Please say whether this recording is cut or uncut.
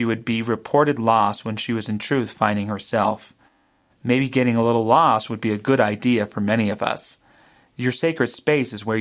uncut